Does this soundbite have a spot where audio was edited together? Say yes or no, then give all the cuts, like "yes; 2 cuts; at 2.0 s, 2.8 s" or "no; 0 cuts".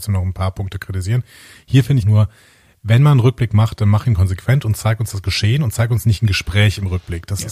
yes; 1 cut; at 2.0 s